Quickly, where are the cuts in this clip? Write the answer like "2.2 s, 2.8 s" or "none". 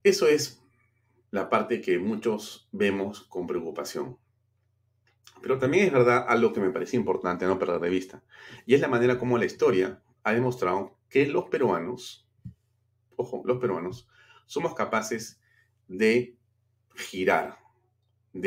none

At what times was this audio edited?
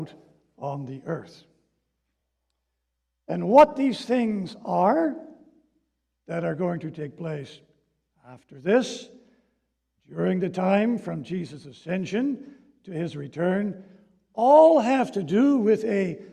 none

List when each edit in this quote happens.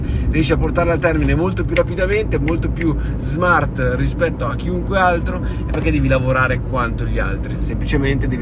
5.7 s

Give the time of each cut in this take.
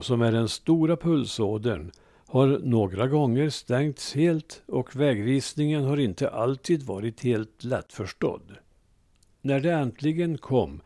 9.4 s

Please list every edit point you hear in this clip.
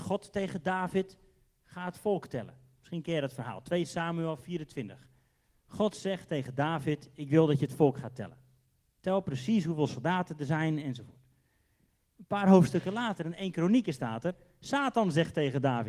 none

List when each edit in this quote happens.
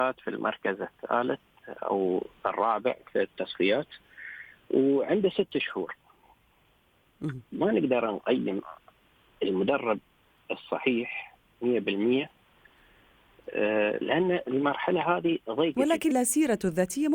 16.1 s

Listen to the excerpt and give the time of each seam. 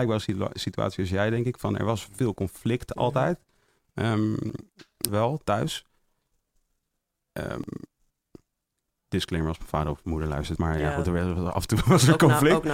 5.1 s, 10.6 s

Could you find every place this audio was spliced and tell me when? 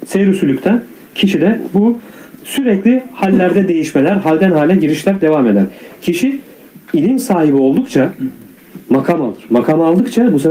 none

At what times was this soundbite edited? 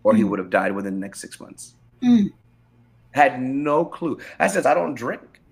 3.0 s, 4.6 s

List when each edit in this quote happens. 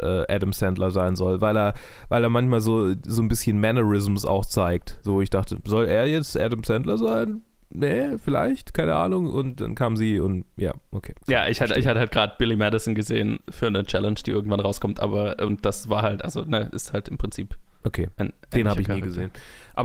none

